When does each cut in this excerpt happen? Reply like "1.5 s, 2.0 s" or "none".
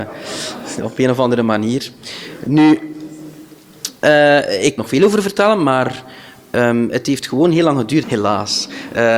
4.8 s, 8.0 s